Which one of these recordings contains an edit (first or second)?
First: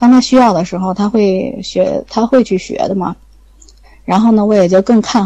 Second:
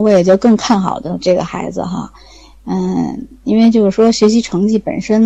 first